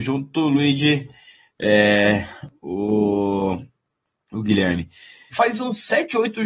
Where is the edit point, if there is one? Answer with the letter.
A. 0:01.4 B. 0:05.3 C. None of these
B